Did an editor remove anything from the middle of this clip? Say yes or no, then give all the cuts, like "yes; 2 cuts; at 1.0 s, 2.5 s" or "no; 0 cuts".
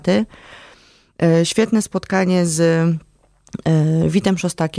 no; 0 cuts